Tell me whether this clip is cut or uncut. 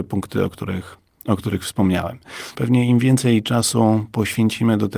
cut